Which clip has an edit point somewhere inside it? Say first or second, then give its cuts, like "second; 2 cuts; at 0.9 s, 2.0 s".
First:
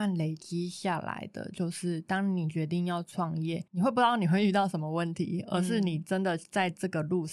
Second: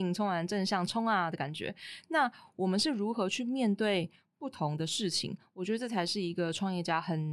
first; 1 cut; at 3.7 s